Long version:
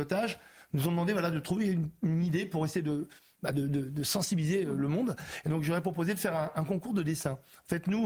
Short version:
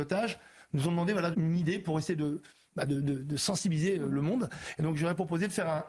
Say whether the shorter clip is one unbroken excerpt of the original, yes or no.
no